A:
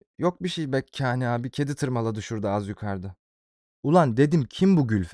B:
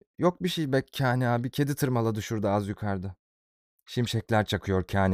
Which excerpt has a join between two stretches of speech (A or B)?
A